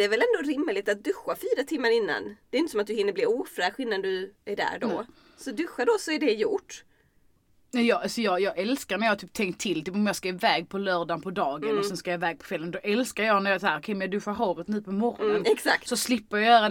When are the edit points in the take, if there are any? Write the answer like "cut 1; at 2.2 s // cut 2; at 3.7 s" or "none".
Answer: none